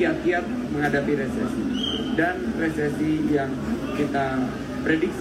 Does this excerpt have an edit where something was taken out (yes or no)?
no